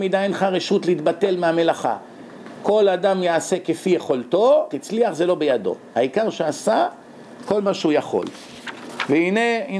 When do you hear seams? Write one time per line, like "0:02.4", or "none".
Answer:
0:04.7